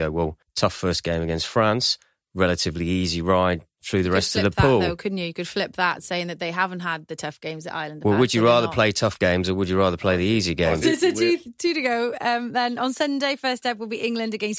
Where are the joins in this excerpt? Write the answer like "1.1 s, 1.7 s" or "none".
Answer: 10.8 s